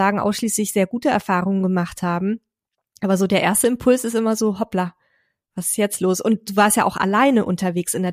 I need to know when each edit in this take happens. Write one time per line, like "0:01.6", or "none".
none